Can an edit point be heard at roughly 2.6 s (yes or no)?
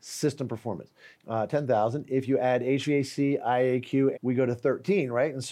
no